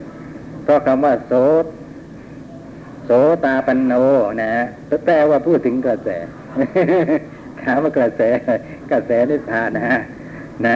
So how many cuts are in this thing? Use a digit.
1